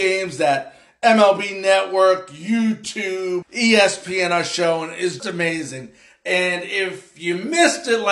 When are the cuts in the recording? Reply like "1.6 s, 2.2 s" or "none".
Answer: 3.4 s, 5.2 s